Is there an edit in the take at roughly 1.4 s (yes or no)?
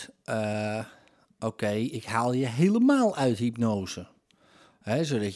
no